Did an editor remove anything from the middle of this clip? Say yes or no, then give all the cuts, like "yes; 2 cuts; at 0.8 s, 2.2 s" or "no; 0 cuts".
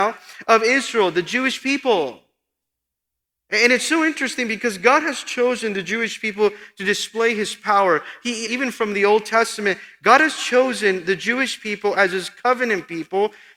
yes; 1 cut; at 8.5 s